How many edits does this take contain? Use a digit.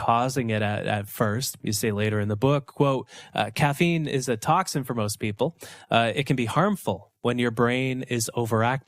2